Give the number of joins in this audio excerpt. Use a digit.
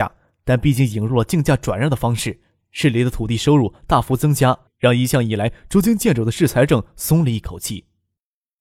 1